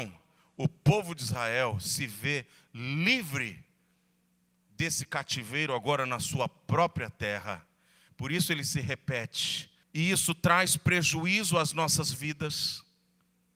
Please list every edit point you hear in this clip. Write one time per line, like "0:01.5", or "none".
0:08.1
0:09.8